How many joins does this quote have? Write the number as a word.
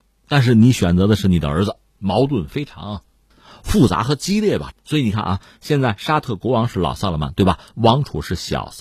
two